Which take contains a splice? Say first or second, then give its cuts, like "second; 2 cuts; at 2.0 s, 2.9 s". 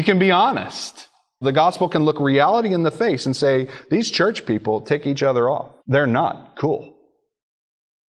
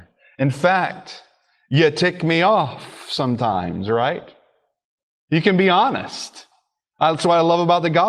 first; 2 cuts; at 1.4 s, 5.8 s